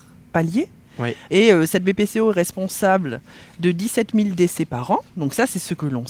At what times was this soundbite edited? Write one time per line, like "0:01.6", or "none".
0:01.3